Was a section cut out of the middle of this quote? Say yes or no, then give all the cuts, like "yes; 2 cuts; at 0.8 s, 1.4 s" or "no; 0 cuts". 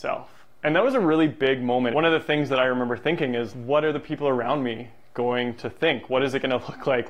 yes; 2 cuts; at 1.9 s, 3.5 s